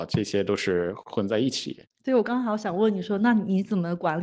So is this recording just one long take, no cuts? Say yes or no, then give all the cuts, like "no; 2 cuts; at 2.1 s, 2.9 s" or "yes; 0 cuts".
yes; 0 cuts